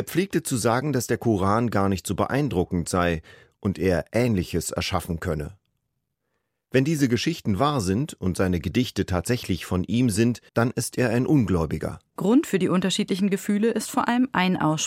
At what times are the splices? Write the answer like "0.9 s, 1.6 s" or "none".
10.5 s, 12.2 s

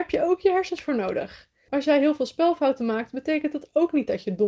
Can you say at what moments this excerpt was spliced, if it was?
1.7 s

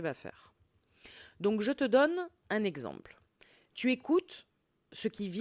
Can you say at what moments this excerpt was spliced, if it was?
none

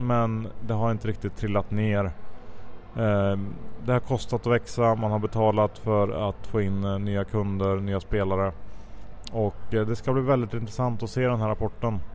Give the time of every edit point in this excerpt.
3.8 s

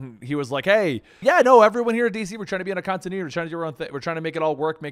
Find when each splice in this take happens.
1.2 s

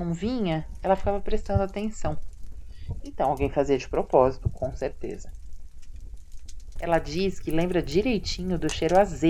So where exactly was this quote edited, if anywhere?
3.0 s, 6.8 s

